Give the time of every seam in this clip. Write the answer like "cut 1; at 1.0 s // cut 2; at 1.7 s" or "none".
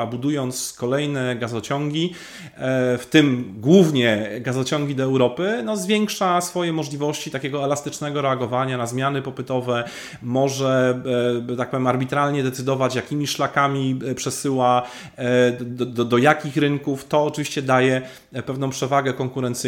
none